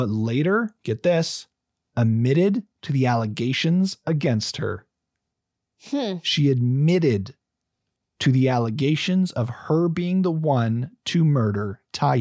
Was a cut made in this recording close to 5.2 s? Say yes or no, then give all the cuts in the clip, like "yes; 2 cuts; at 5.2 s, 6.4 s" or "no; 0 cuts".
no; 0 cuts